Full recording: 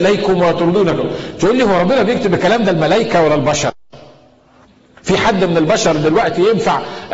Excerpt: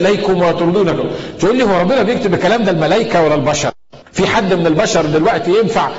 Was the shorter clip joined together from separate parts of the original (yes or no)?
yes